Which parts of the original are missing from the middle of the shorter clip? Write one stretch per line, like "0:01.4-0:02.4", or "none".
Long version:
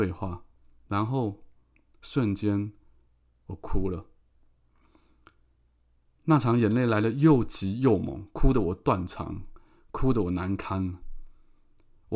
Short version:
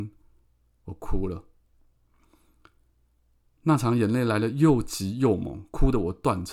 none